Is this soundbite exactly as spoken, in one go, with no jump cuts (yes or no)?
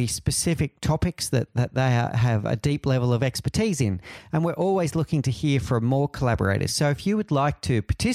yes